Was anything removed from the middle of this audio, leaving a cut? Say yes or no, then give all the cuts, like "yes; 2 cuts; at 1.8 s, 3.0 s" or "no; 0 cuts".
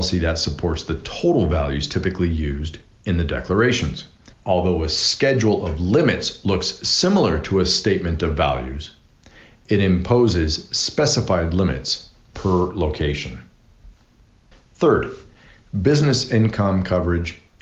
yes; 1 cut; at 4.3 s